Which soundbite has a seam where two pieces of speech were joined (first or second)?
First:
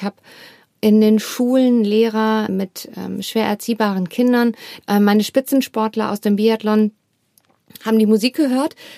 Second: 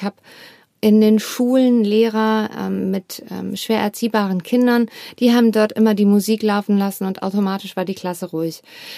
first